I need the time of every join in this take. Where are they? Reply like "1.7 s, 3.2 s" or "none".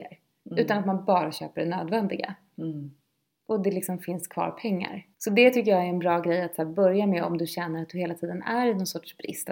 5.1 s